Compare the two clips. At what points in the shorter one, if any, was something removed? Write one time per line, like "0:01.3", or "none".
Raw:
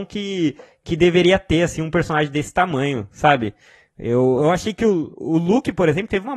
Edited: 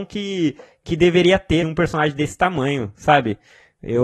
0:01.6